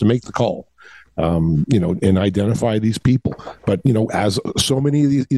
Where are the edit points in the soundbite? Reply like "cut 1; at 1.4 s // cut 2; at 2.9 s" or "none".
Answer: none